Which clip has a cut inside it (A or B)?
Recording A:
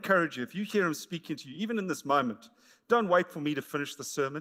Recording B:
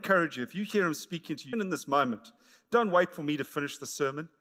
B